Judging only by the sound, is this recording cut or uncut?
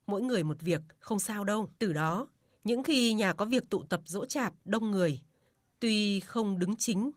cut